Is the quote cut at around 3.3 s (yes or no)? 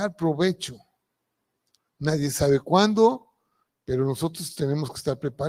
no